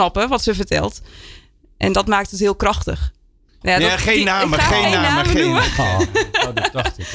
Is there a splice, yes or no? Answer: yes